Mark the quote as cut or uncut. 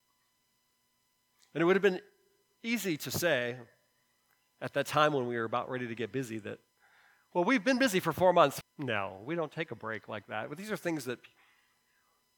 cut